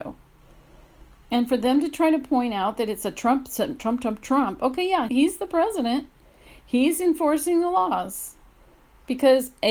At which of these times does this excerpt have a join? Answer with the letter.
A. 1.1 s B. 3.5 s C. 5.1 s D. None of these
C